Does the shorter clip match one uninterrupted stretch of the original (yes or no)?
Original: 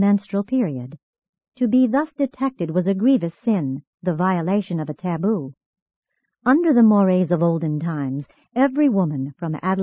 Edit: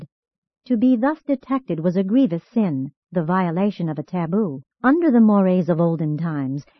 no